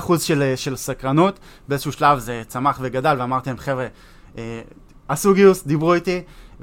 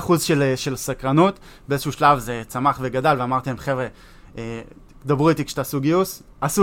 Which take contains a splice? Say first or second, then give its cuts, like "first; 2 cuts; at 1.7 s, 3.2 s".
first; 1 cut; at 5.0 s